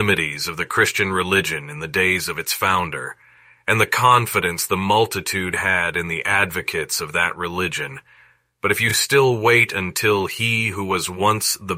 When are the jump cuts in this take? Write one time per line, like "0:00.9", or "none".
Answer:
none